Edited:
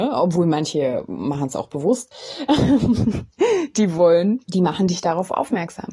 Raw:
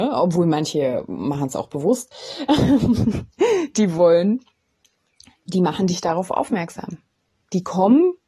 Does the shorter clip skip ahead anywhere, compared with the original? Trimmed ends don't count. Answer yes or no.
yes